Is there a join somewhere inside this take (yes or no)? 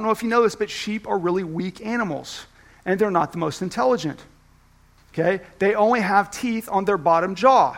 no